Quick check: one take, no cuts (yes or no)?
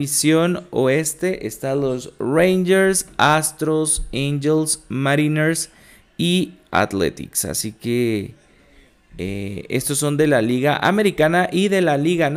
yes